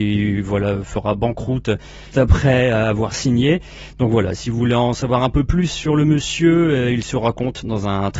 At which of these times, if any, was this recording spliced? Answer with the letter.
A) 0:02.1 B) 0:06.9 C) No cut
A